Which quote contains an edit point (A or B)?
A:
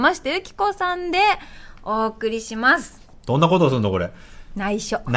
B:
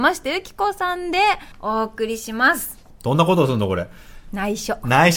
B